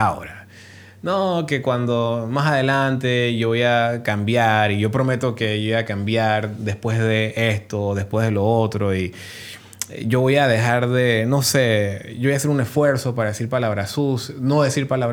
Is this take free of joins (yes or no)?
yes